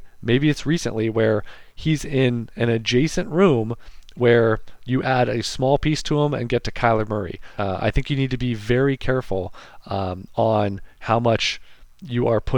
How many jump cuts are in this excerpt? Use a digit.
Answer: 1